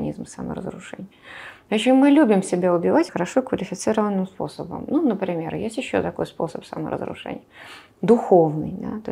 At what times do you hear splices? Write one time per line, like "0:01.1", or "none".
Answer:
0:03.1